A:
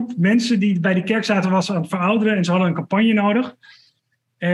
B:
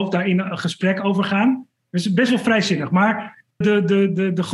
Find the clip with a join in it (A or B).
B